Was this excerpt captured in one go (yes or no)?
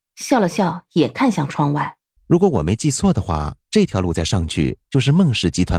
no